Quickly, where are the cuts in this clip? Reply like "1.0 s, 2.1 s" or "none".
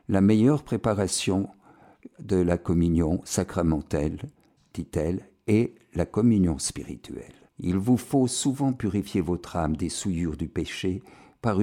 7.5 s

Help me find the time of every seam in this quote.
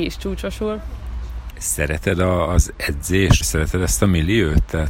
1.5 s, 3.4 s

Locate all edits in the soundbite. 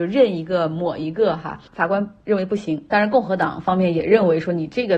2.9 s

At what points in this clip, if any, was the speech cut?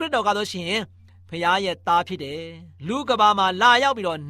2.8 s

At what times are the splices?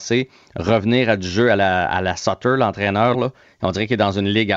3.1 s

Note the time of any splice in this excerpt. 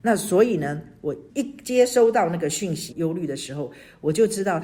1.3 s, 2.9 s

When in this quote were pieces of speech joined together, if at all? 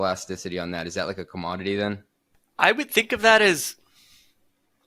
none

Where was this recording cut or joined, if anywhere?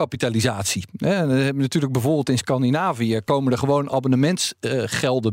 none

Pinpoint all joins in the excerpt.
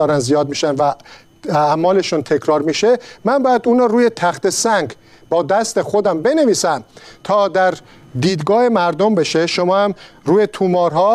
none

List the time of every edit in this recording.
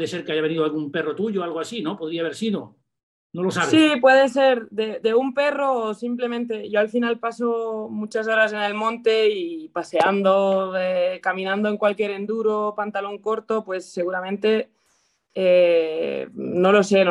none

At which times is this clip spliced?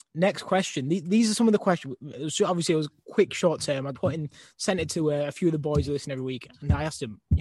3.9 s

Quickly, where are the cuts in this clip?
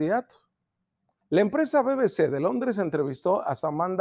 1.2 s

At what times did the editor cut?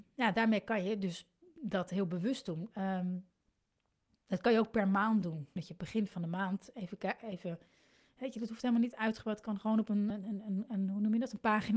5.6 s, 10.1 s

